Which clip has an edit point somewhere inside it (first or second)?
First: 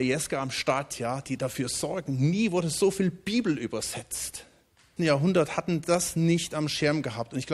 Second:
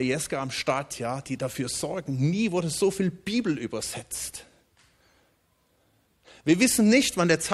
first